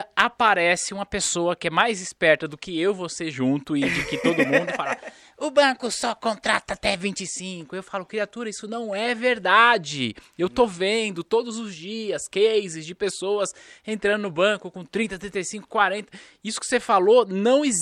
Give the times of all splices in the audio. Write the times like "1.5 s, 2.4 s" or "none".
none